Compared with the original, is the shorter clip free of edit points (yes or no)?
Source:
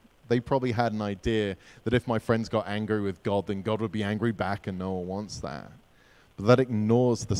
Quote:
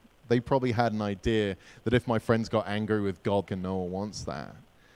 no